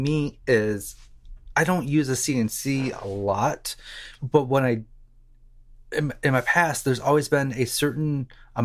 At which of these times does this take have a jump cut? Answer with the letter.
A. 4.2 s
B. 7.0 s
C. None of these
A